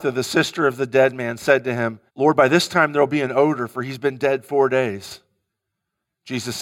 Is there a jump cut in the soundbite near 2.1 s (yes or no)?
yes